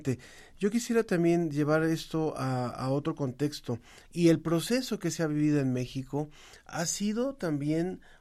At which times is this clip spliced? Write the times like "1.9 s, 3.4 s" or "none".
4.0 s